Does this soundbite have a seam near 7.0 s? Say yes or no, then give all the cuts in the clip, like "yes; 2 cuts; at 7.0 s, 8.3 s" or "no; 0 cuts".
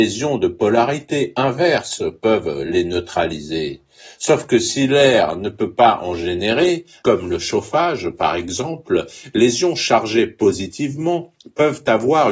yes; 1 cut; at 7.0 s